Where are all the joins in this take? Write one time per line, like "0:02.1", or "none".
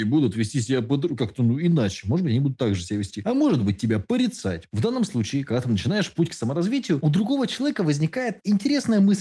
none